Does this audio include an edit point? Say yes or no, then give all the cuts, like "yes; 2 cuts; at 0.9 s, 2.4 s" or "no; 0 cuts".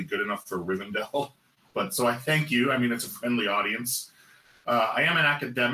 no; 0 cuts